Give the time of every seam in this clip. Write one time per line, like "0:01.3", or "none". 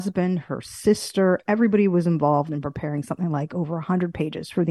none